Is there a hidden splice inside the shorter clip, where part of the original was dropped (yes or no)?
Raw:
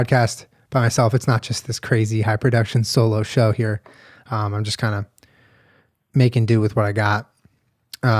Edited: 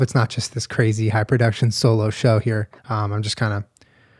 yes